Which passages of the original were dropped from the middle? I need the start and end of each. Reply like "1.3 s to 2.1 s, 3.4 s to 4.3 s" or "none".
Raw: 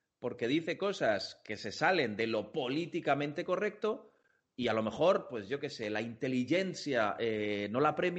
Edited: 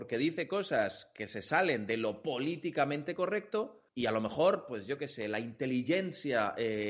4.2 s to 4.5 s

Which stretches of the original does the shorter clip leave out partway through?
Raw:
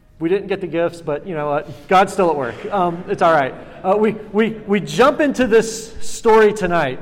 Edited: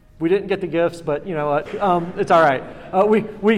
1.7 s to 2.6 s

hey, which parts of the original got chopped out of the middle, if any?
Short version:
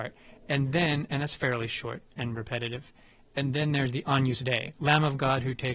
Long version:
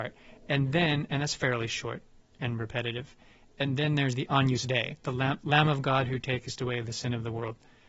2.1 s to 2.3 s, 5.0 s to 5.4 s

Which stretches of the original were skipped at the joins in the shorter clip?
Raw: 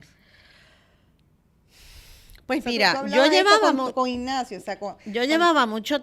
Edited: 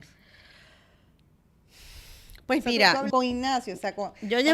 3.1 s to 3.9 s

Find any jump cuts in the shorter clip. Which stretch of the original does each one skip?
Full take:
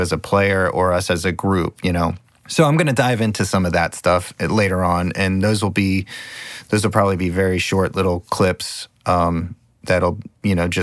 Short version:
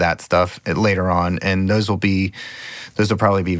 none

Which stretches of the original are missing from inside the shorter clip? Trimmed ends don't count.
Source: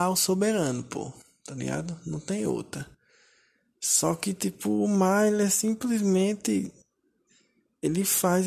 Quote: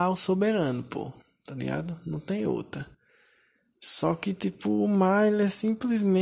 none

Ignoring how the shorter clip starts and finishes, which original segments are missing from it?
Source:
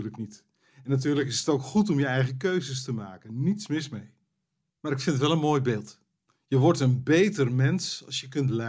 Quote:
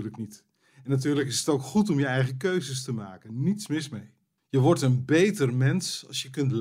4.4 s to 6.4 s

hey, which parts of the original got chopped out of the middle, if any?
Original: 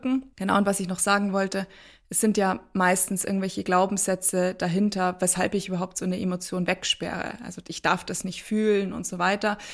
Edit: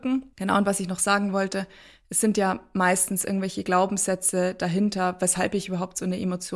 none

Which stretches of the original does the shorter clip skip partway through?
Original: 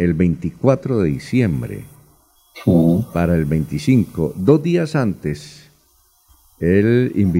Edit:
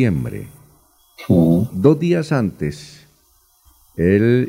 3.1 s to 4.3 s

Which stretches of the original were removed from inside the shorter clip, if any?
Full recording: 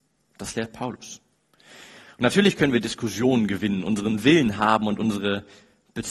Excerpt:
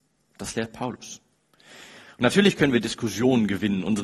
none

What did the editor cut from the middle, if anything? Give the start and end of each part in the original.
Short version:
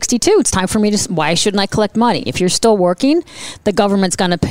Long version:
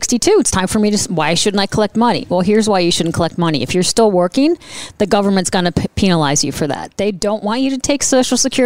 2.3 s to 3.6 s

